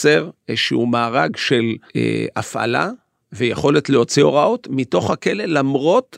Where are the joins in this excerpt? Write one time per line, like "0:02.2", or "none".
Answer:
0:01.9

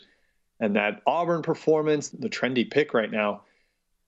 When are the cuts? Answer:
0:02.1

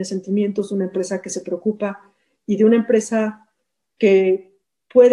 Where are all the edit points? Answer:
none

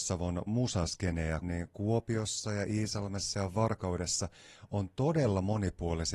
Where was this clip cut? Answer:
0:01.4

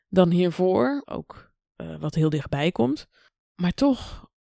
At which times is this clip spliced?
0:01.0

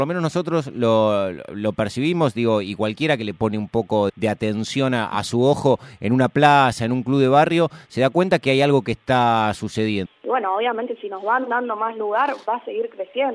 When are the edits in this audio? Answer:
0:04.1
0:10.1

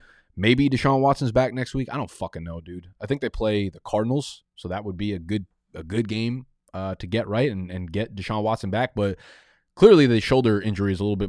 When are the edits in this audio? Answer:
none

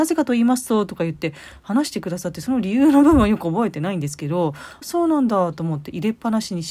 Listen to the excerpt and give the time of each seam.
0:04.8

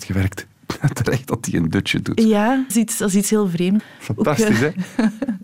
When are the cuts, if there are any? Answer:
0:02.7
0:03.8

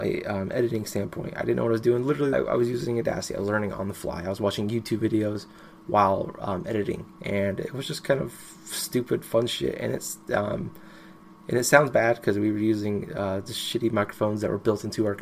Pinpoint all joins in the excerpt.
0:02.3

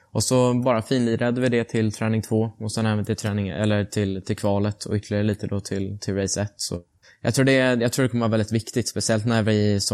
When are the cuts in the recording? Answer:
none

